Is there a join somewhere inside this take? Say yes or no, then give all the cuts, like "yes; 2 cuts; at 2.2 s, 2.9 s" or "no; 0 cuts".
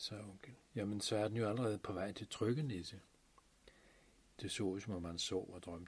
yes; 1 cut; at 4.4 s